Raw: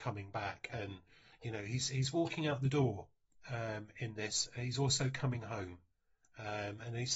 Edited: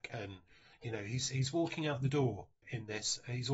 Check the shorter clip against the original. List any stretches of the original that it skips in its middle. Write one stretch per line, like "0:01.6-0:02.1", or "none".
0:03.2-0:03.9